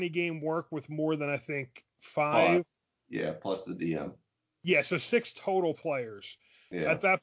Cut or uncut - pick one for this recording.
uncut